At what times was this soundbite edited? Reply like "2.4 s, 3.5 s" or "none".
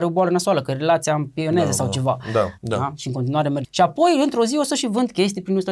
2.6 s, 3.6 s